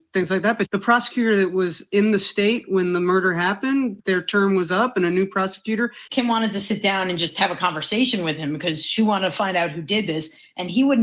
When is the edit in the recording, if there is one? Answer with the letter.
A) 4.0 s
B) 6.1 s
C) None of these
B